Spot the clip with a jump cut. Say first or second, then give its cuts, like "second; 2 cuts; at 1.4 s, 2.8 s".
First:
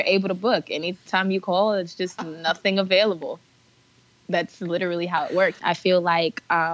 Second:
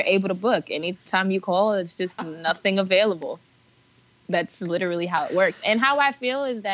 first; 1 cut; at 5.6 s